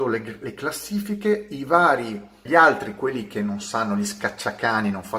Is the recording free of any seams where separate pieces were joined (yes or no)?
no